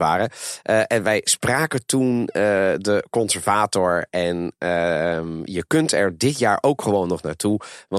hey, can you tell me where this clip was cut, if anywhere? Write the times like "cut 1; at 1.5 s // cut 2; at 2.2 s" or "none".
none